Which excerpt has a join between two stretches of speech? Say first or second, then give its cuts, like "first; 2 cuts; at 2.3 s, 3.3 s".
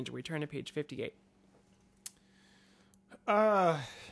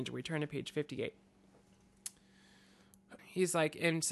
second; 1 cut; at 3.2 s